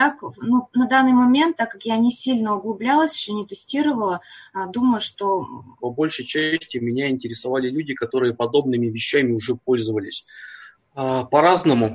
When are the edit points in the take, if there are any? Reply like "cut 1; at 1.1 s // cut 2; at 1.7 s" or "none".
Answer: cut 1; at 5.8 s // cut 2; at 10.7 s